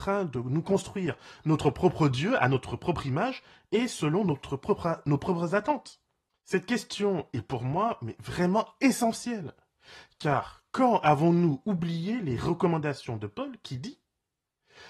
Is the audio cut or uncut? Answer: uncut